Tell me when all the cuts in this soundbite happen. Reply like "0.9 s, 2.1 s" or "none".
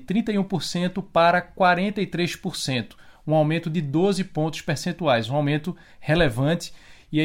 none